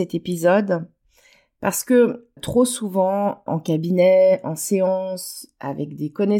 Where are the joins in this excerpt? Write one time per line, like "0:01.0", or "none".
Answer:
0:02.4
0:03.5